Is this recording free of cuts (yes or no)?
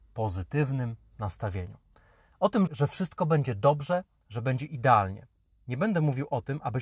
no